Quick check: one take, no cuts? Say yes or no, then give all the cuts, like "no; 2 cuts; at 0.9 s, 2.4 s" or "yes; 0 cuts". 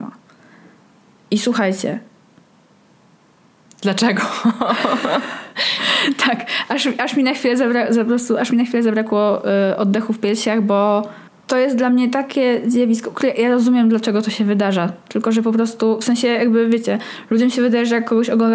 yes; 0 cuts